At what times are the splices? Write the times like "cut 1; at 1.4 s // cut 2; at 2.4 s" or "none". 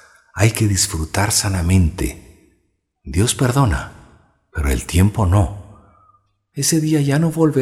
cut 1; at 6.5 s